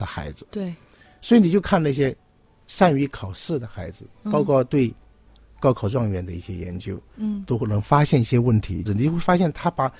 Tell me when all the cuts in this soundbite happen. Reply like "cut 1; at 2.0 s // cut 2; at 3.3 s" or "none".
cut 1; at 8.9 s